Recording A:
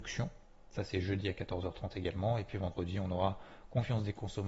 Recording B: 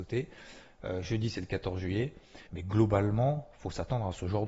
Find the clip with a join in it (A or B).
B